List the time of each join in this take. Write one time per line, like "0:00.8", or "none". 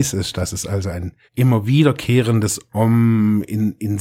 0:01.3